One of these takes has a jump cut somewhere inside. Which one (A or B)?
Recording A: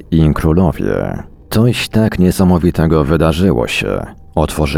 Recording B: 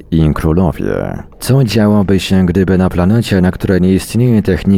B